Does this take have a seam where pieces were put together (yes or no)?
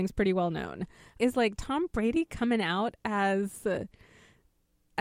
yes